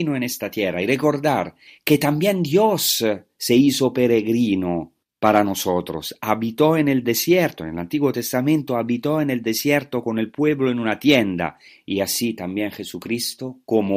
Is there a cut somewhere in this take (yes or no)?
no